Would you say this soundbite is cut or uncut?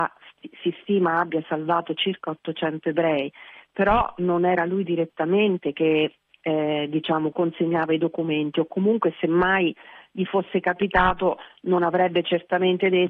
uncut